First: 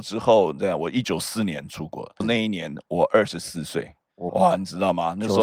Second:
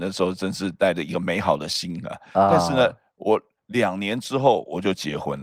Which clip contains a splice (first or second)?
first